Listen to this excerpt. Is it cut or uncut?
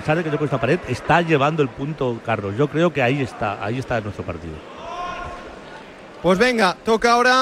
uncut